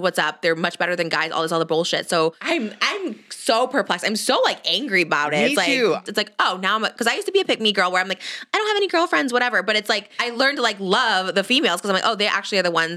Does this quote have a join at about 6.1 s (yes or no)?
yes